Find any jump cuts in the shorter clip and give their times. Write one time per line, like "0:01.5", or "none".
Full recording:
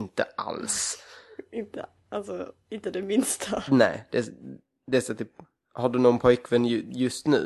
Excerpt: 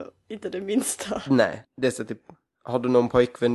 0:01.6

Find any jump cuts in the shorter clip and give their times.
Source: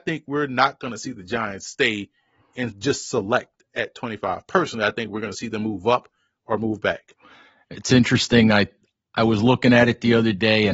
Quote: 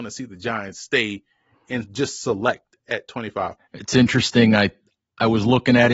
0:03.6

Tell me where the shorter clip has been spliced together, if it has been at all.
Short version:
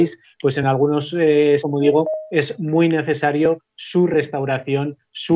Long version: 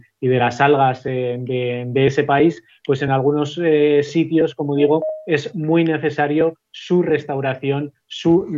0:01.6

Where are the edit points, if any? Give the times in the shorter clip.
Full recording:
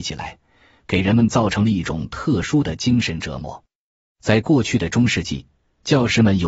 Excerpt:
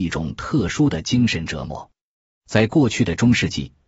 none

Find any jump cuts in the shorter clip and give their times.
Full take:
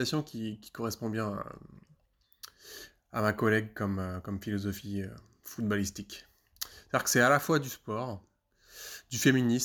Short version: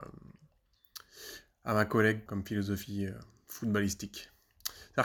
0:02.3

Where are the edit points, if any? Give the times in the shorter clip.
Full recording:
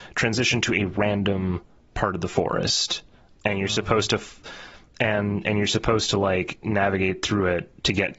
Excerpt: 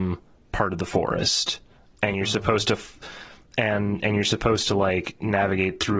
none

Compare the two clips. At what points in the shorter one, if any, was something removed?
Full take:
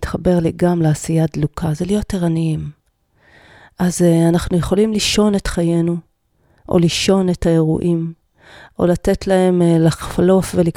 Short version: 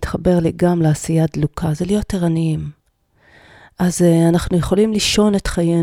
none

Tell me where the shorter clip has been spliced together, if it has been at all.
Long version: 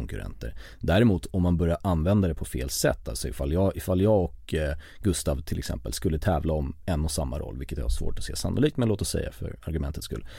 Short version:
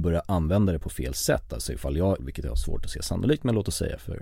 0:02.2

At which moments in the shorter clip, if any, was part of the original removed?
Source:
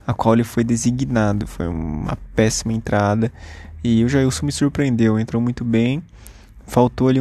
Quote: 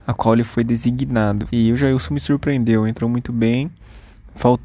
0:01.5

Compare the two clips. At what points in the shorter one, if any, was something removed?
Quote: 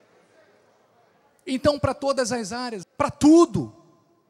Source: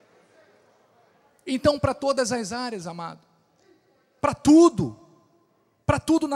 0:02.8

